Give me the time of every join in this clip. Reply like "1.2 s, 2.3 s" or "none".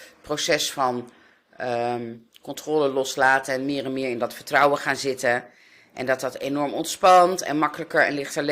none